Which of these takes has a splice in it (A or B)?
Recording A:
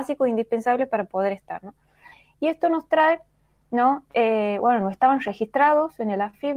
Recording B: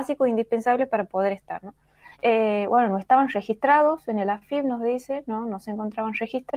B